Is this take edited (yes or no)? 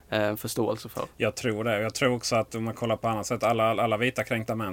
no